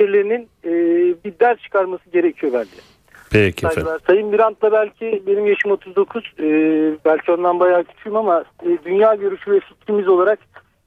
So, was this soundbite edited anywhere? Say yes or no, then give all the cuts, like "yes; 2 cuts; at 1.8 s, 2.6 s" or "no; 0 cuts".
yes; 1 cut; at 4.0 s